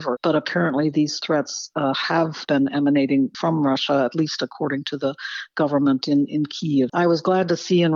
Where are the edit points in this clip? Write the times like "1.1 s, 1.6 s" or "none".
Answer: 6.9 s